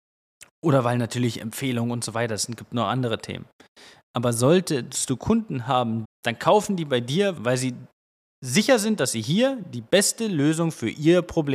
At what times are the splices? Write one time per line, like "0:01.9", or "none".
0:06.0
0:07.4